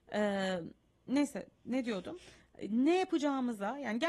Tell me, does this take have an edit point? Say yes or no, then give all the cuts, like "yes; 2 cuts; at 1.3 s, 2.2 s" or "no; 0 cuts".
no; 0 cuts